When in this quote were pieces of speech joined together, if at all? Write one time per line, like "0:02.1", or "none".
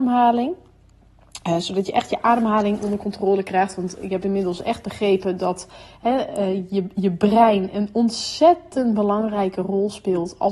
none